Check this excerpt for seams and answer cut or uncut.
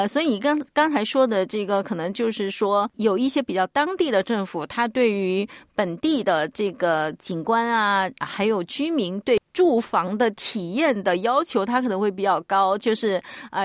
uncut